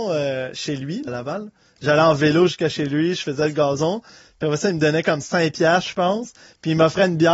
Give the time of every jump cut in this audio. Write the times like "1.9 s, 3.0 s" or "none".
1.1 s